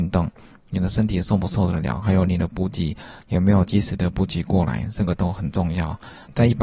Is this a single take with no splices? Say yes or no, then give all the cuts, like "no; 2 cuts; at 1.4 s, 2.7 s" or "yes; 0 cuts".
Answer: yes; 0 cuts